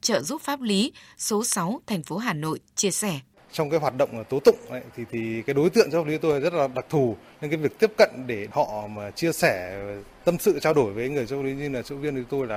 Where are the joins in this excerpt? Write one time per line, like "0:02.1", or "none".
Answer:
none